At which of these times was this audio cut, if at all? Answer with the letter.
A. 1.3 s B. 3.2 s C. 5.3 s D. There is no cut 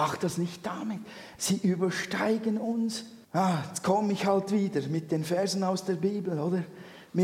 B